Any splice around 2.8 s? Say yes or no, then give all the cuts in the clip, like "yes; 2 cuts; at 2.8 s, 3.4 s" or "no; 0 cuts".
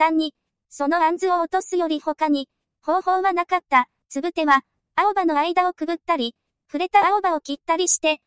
no; 1 cut; at 4.0 s